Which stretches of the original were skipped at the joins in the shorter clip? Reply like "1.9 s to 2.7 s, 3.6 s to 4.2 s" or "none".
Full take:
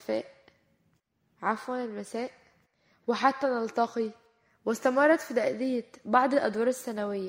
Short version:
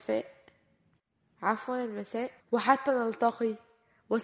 2.4 s to 2.9 s